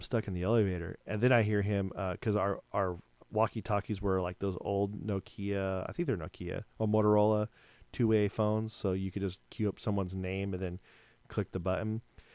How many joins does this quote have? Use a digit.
1